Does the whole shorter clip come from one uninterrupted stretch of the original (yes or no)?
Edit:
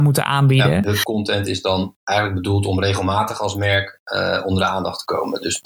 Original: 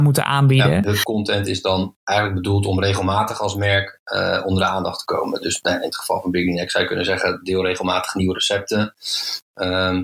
yes